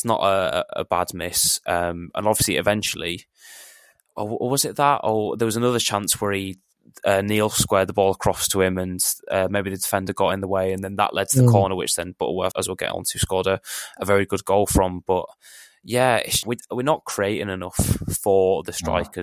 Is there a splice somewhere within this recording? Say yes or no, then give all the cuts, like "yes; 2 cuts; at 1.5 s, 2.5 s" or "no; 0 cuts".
yes; 2 cuts; at 12.5 s, 16.4 s